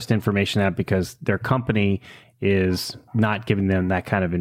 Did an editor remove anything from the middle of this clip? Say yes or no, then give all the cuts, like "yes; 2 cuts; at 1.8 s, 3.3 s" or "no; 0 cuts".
no; 0 cuts